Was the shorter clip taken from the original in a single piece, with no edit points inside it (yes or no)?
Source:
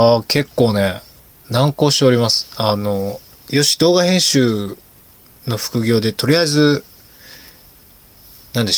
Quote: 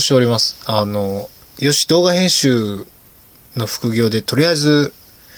yes